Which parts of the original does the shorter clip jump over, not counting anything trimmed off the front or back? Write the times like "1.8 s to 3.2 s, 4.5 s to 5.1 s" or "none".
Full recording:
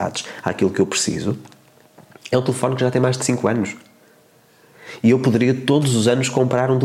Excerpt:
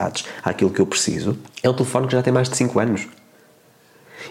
1.5 s to 2.2 s